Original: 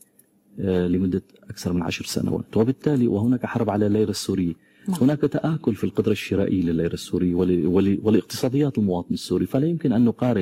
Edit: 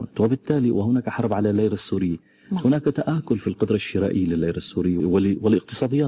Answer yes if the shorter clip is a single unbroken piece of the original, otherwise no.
no